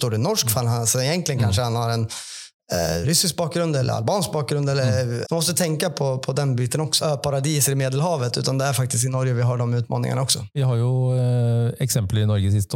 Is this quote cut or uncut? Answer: cut